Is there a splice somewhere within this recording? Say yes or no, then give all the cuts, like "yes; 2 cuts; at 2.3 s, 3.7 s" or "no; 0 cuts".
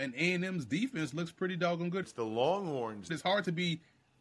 yes; 2 cuts; at 2.0 s, 3.1 s